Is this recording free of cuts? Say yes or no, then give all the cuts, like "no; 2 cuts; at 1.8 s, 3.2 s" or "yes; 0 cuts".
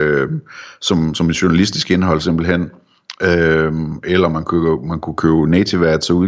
yes; 0 cuts